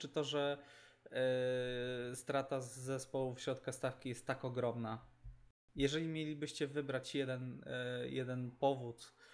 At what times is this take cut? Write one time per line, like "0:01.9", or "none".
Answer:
none

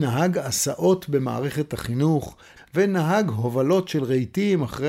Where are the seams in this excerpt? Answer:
0:02.6

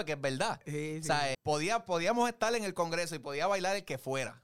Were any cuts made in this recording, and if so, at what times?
0:01.3

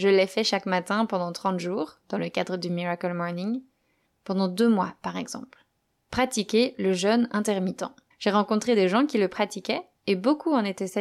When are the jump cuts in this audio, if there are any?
0:04.1
0:06.0
0:08.1

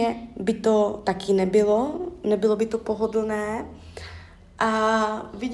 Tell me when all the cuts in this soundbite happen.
none

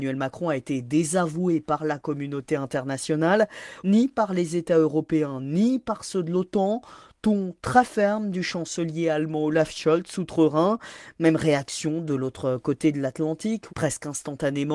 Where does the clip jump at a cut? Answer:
0:03.8
0:13.7

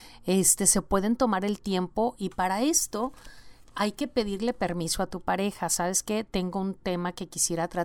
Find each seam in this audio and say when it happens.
none

